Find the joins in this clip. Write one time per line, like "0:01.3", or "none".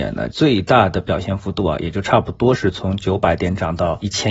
none